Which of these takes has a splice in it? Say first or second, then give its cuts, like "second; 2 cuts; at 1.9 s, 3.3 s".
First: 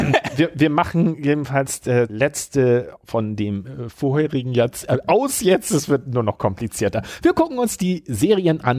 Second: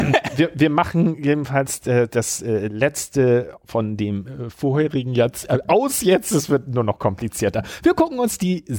first; 1 cut; at 2.1 s